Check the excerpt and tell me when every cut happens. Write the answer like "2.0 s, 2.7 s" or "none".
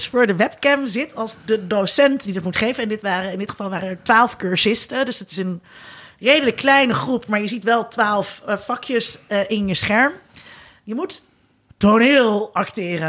none